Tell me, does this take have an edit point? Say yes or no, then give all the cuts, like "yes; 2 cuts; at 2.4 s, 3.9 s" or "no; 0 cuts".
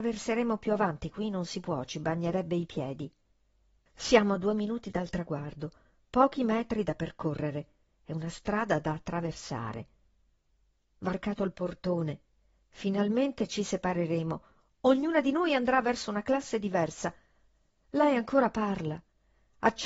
yes; 1 cut; at 3.8 s